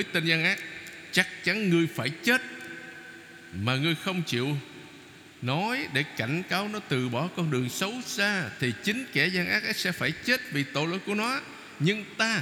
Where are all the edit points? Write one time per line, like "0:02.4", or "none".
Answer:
none